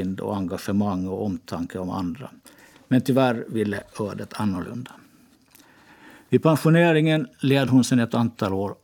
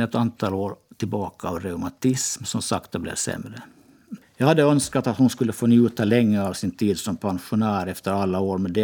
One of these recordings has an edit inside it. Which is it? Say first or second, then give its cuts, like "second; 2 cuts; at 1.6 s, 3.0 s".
second; 1 cut; at 4.2 s